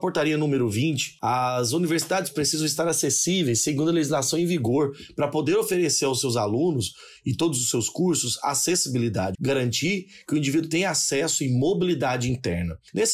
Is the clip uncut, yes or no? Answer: no